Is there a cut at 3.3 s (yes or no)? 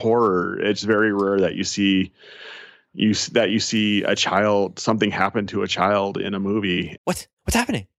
no